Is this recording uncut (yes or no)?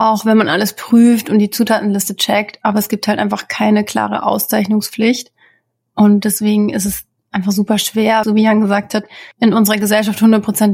no